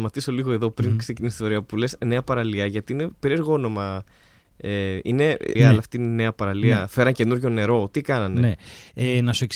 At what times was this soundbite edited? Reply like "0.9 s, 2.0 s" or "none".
5.6 s